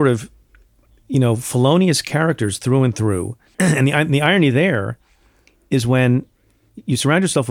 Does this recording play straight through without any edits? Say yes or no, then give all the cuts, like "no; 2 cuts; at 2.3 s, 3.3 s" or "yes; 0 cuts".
no; 1 cut; at 3.5 s